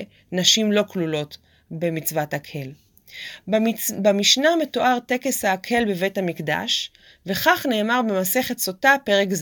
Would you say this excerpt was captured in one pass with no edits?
yes; 0 cuts

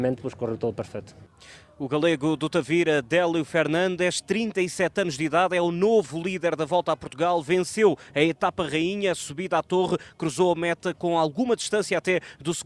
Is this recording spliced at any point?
no; 0 cuts

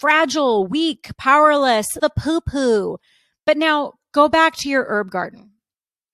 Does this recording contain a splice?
yes; 1 cut; at 2.0 s

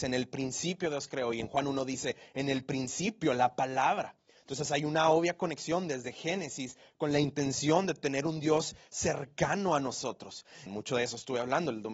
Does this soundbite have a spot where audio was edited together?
yes; 1 cut; at 10.7 s

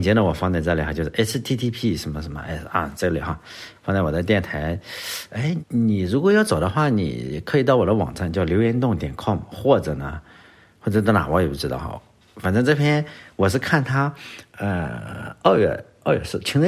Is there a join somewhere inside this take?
yes; 1 cut; at 5.6 s

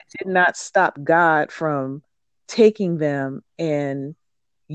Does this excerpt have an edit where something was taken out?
no; 0 cuts

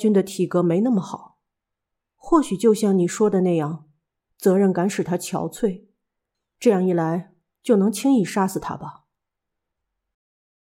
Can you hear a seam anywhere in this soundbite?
no; 0 cuts

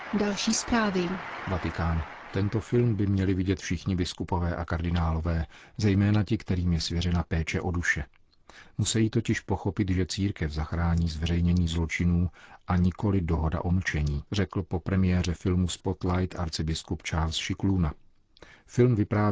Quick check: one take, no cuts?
no; 1 cut; at 14.3 s

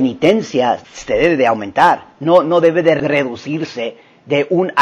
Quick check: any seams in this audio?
no; 0 cuts

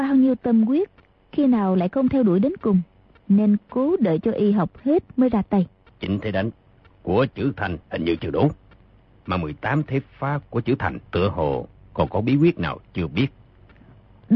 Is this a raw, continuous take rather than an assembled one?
no; 3 cuts; at 5.9 s, 7.8 s, 11.1 s

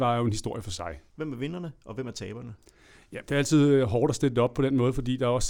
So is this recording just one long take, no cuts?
no; 1 cut; at 1.1 s

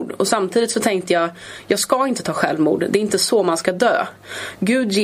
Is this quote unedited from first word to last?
yes; 0 cuts

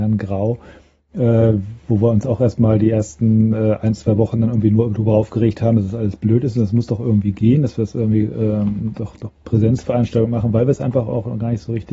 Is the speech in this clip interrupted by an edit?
no; 0 cuts

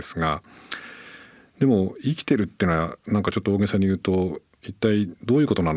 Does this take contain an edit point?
no; 0 cuts

